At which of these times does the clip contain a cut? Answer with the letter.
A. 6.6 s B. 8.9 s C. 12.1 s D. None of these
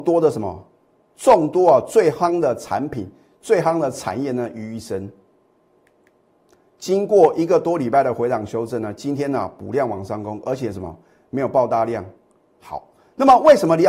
A